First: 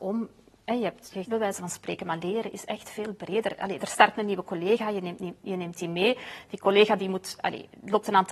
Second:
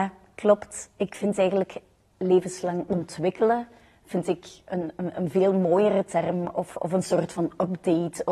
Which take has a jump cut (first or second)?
first